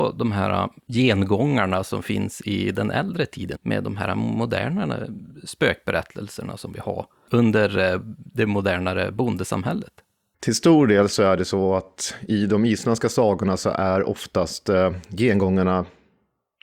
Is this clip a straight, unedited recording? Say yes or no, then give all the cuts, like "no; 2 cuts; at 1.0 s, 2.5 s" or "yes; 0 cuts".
no; 1 cut; at 3.5 s